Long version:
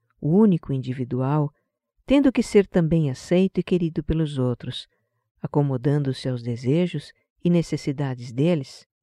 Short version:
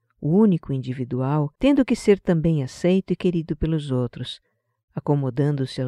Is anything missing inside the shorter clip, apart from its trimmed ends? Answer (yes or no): yes